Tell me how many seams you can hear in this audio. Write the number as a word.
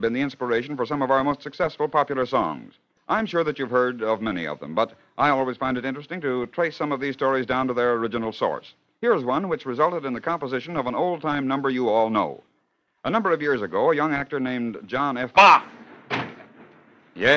one